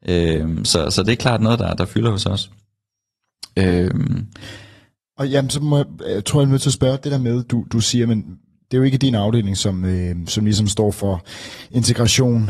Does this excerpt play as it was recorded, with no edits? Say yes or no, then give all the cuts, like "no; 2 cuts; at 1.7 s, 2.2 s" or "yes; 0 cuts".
yes; 0 cuts